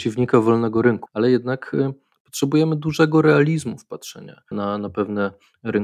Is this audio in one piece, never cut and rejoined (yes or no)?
no